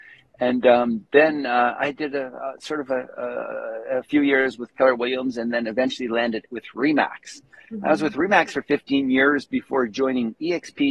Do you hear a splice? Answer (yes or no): no